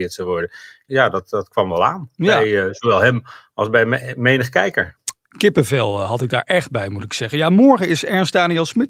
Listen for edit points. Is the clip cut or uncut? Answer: uncut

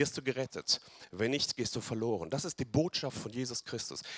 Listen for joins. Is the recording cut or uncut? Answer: uncut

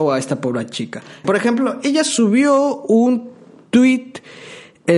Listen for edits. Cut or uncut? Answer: cut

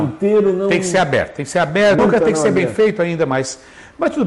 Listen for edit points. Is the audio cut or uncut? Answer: cut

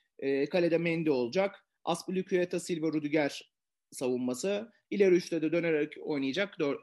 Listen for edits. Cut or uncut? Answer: cut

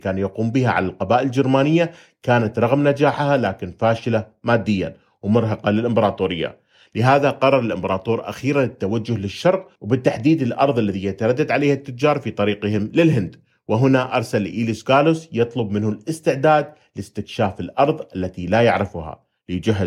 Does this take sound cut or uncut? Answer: uncut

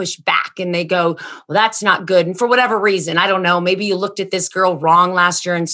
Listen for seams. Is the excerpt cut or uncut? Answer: uncut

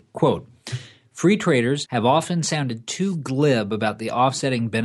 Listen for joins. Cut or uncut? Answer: cut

